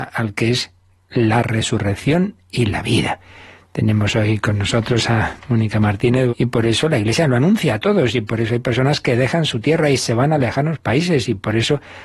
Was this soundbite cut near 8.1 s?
no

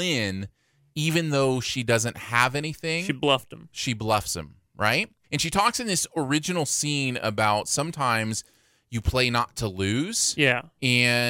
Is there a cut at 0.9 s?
no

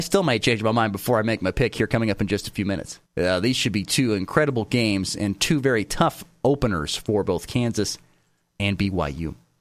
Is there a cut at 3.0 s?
yes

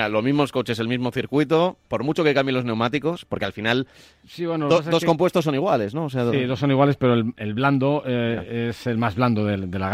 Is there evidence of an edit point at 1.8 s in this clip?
yes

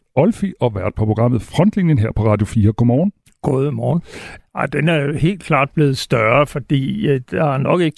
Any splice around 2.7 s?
no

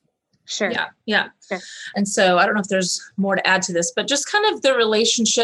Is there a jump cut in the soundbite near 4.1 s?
no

